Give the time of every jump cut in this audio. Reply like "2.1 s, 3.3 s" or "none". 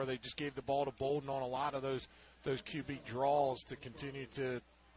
none